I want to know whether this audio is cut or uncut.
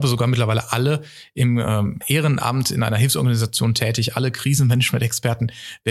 cut